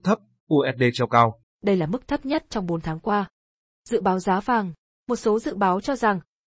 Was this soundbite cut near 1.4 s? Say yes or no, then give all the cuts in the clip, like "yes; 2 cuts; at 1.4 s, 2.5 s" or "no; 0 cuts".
yes; 1 cut; at 1.4 s